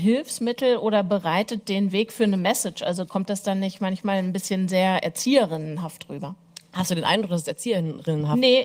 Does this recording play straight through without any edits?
yes; 0 cuts

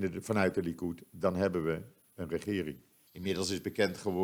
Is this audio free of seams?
no; 1 cut; at 3.1 s

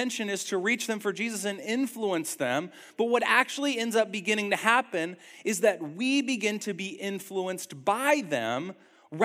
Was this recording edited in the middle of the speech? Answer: no; 0 cuts

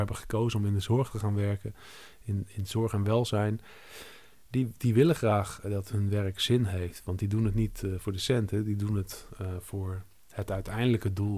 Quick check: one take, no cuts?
yes; 0 cuts

